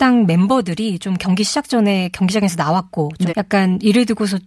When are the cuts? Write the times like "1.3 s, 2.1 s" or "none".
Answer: 3.3 s